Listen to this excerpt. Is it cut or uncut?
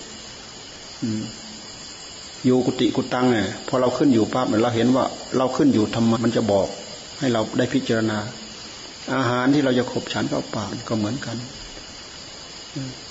cut